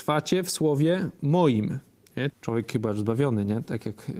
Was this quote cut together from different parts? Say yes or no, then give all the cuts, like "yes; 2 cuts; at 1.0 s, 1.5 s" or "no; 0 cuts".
yes; 1 cut; at 2.3 s